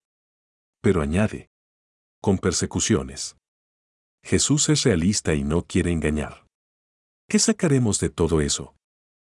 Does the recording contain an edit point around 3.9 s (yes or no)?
no